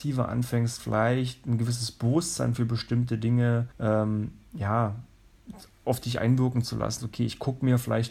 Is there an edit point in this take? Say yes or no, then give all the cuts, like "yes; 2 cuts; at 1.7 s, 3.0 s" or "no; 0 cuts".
yes; 2 cuts; at 3.7 s, 7.0 s